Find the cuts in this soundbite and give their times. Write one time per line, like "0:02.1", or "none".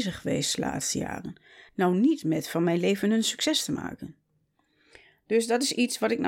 none